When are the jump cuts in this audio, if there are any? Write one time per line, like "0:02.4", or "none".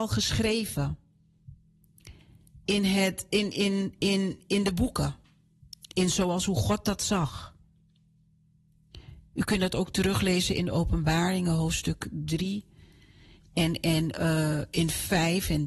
none